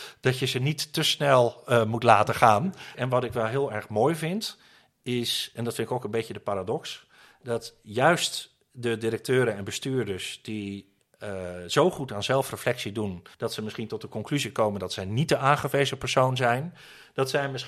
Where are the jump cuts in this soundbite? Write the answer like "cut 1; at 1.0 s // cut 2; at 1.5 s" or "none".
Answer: cut 1; at 2.9 s // cut 2; at 13.3 s